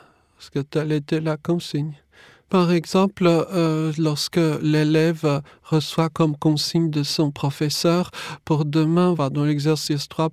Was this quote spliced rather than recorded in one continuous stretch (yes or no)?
yes